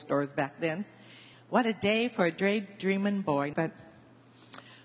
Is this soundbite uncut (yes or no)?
no